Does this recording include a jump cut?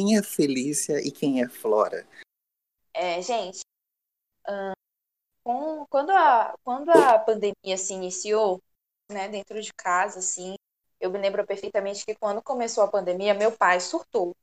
yes; 1 cut; at 9.1 s

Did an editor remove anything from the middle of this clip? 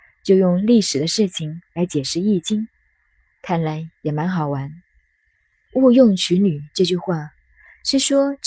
yes; 1 cut; at 5.7 s

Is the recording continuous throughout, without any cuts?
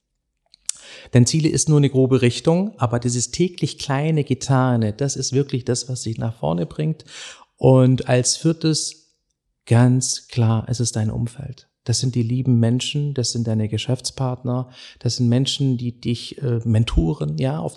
yes; 0 cuts

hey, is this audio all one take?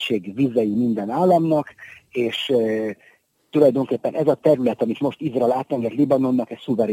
yes; 0 cuts

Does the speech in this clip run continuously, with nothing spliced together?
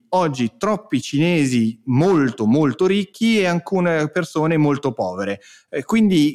yes; 0 cuts

